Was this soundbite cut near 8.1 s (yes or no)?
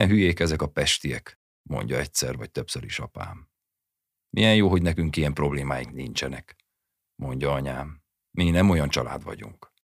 no